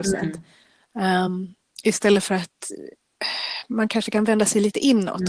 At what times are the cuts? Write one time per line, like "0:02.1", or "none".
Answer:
none

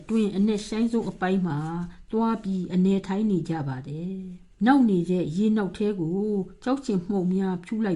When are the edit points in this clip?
0:04.6

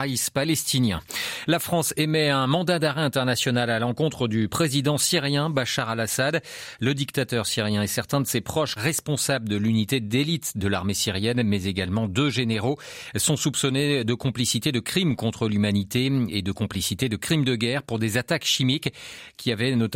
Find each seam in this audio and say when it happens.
0:08.8

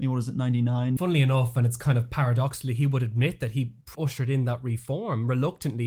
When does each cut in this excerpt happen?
0:01.0
0:03.9

